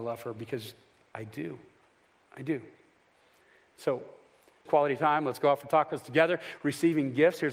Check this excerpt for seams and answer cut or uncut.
cut